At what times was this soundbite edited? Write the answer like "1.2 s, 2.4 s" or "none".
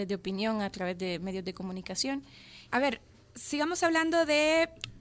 2.7 s